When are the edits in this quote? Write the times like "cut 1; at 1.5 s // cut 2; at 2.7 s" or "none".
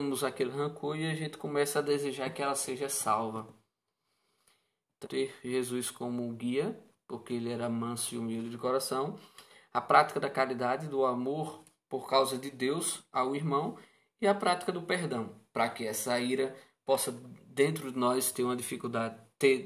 cut 1; at 5.0 s // cut 2; at 15.5 s